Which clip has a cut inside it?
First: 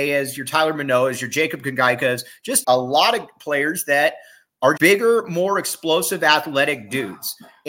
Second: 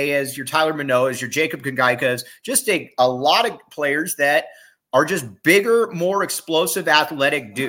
first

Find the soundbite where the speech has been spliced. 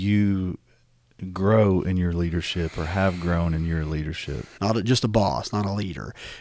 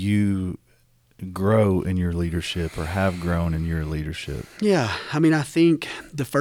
first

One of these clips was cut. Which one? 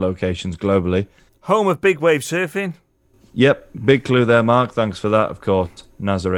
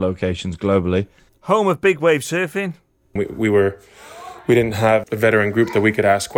second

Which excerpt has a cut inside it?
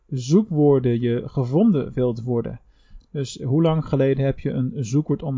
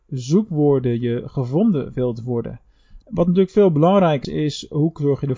second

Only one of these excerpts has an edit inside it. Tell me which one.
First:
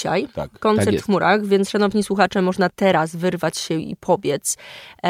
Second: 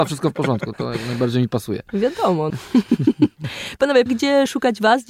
second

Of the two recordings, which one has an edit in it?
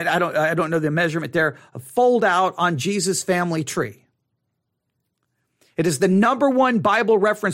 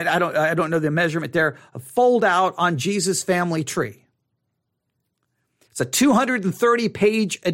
second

